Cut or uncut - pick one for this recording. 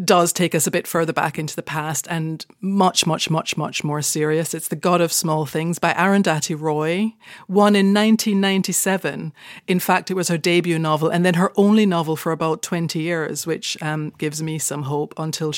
uncut